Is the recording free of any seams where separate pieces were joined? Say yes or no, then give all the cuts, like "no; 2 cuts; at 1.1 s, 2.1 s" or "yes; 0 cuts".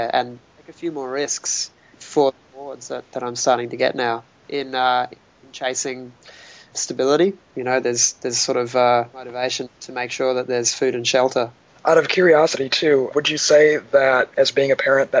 no; 2 cuts; at 7.5 s, 13.1 s